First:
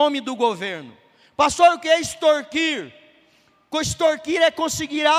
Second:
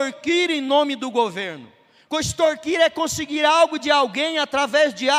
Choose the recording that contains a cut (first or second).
second